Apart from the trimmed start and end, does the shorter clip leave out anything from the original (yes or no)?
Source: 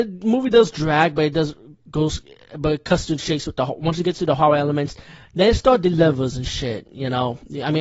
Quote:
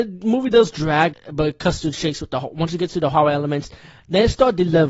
yes